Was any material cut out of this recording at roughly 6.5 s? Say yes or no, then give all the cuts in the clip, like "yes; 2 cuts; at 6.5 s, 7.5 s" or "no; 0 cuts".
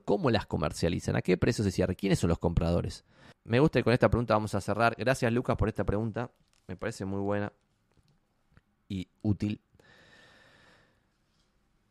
no; 1 cut; at 3.3 s